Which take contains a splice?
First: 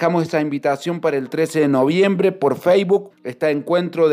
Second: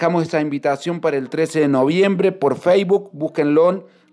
first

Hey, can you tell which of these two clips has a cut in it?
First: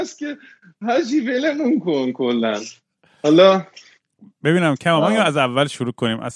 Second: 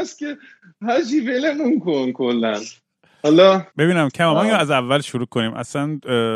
second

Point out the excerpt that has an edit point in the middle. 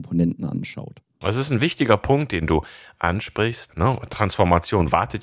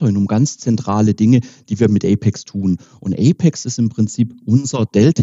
first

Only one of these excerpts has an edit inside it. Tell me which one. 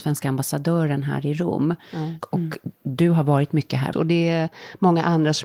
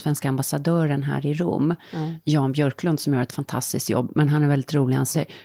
first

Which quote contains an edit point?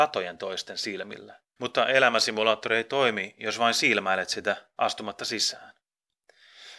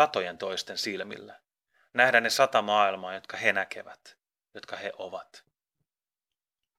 first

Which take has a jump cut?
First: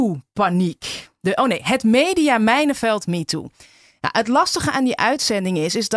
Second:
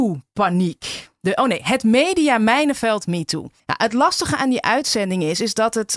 second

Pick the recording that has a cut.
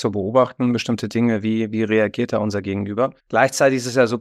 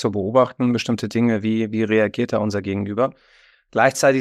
first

